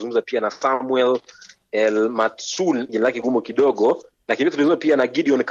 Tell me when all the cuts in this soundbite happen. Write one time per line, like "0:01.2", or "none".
0:02.9